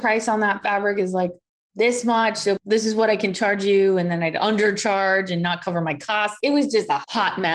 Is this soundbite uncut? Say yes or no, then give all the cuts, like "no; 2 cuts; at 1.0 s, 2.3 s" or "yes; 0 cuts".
no; 1 cut; at 2.6 s